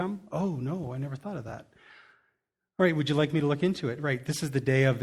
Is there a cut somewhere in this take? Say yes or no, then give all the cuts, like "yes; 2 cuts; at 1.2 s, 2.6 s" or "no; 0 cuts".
no; 0 cuts